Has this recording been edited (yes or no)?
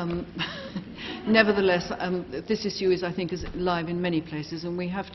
no